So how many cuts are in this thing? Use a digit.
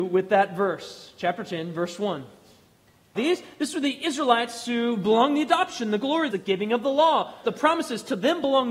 3